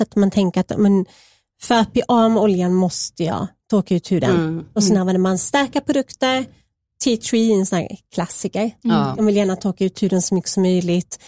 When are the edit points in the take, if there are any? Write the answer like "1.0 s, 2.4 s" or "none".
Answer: none